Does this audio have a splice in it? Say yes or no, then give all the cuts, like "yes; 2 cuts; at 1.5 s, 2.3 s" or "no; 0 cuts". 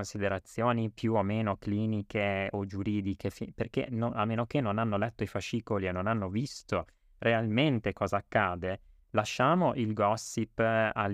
no; 0 cuts